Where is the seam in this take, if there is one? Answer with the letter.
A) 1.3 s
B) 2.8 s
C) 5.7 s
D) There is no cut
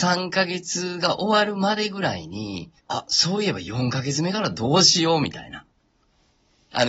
B